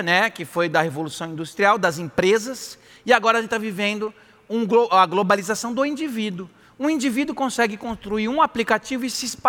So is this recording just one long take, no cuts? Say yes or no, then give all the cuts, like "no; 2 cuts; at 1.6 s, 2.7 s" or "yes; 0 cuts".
yes; 0 cuts